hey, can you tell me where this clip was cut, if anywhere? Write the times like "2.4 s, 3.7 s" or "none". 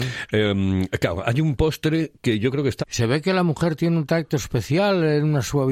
2.8 s